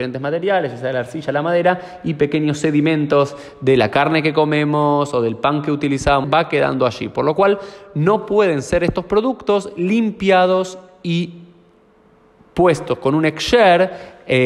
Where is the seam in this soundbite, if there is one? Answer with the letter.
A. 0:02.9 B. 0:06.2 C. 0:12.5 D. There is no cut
B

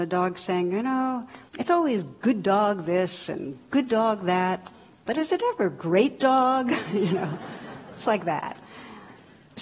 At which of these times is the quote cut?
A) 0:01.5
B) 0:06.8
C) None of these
A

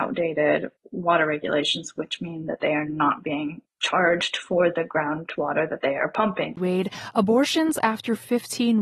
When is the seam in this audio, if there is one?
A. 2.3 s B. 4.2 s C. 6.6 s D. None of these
C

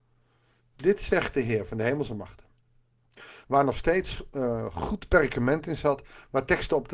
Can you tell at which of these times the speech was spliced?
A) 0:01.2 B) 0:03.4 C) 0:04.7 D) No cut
B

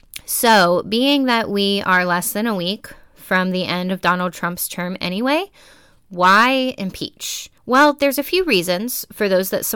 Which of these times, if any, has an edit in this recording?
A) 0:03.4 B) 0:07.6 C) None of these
B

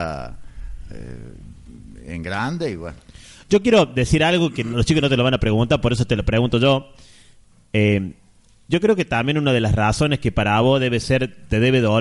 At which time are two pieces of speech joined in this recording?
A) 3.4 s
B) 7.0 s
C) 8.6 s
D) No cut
D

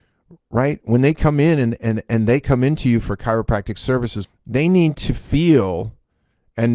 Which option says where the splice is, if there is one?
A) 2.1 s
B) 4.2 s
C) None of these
B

